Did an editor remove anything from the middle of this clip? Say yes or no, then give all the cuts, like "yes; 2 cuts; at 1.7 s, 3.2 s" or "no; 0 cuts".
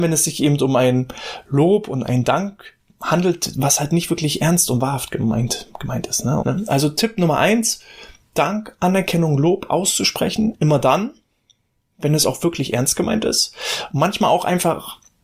yes; 1 cut; at 6.4 s